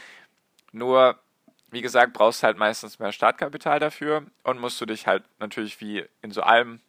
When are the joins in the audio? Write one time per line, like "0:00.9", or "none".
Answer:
none

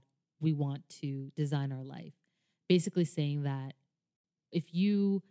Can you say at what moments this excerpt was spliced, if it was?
none

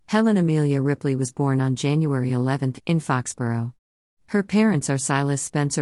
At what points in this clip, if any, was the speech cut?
0:02.8

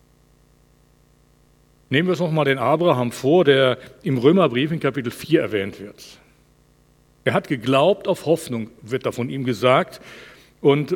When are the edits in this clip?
none

